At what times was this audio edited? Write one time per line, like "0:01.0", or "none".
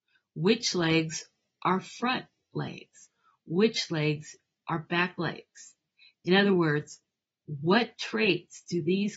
none